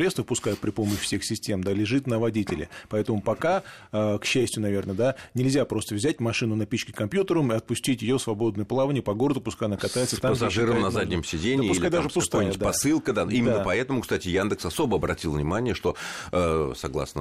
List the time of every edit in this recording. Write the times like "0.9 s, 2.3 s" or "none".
none